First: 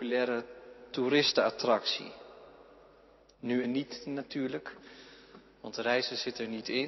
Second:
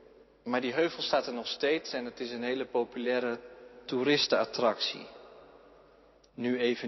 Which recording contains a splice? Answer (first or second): first